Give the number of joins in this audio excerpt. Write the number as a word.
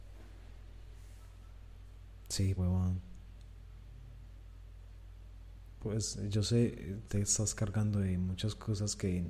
two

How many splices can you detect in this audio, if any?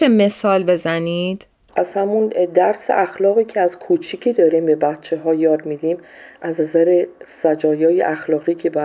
zero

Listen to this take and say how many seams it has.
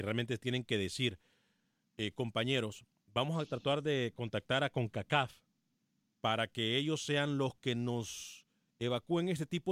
zero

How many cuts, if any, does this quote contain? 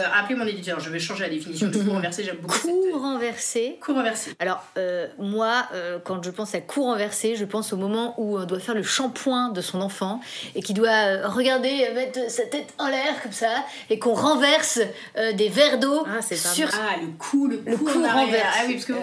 one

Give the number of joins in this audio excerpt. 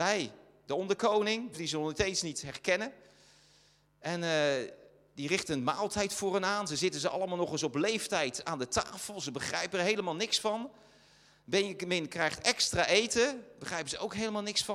one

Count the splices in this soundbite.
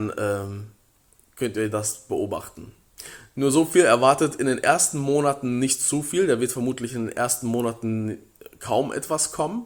zero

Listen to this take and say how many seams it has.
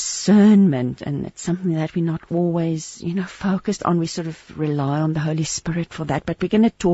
zero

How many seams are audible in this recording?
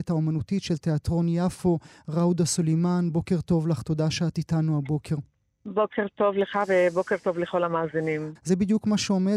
one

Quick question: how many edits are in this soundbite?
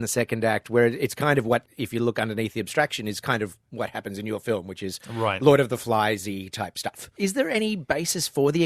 one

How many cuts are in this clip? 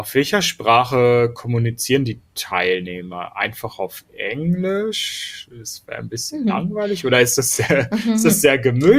zero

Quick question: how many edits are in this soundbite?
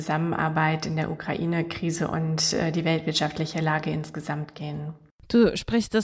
zero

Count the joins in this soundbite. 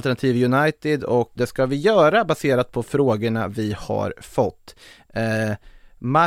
one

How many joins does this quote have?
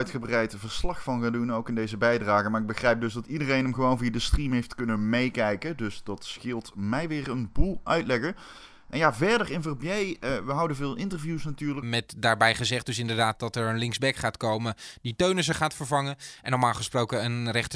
one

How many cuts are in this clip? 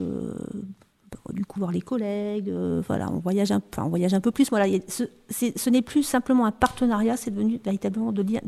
one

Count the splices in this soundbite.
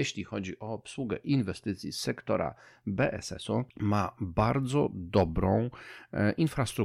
one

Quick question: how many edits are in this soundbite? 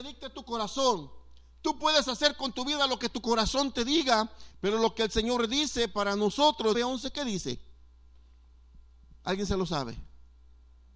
two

